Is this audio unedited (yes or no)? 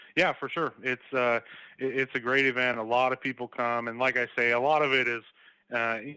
yes